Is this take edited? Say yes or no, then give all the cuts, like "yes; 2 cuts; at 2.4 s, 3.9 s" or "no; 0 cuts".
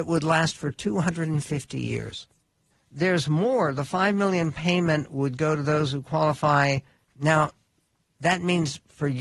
yes; 2 cuts; at 2.7 s, 7.0 s